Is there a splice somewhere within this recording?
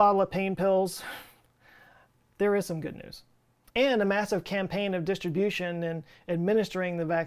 yes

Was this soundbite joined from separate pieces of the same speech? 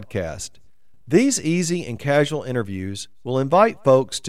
yes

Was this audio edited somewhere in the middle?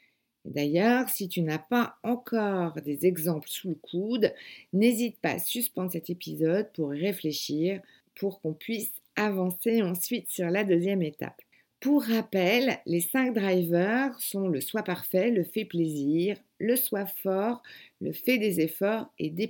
no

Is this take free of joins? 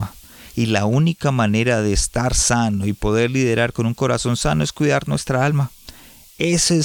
yes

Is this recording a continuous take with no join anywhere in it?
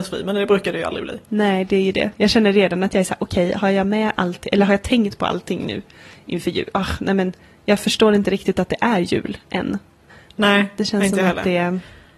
yes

